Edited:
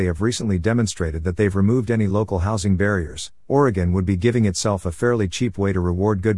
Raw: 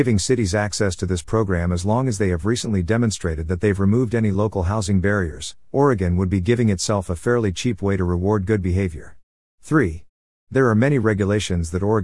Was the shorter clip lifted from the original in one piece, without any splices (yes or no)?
yes